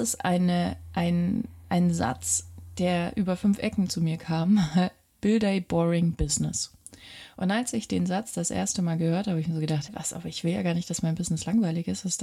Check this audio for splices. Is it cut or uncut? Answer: cut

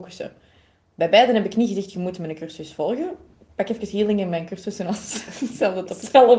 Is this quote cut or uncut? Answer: uncut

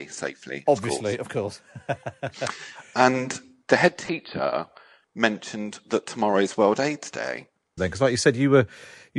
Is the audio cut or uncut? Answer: cut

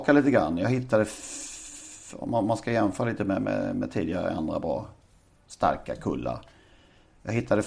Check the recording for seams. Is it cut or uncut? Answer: uncut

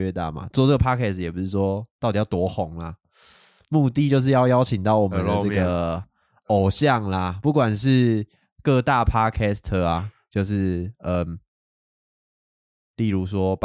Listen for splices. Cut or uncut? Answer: uncut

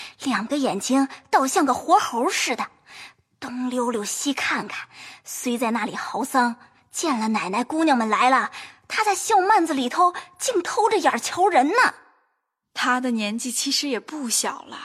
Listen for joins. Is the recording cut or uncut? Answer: uncut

